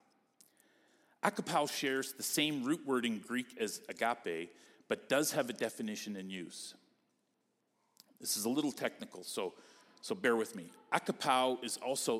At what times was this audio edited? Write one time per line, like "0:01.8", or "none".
none